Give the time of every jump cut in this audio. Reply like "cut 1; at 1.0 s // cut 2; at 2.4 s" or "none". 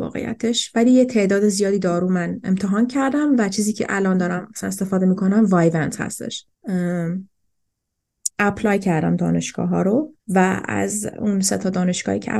cut 1; at 6.5 s // cut 2; at 8.3 s // cut 3; at 10.2 s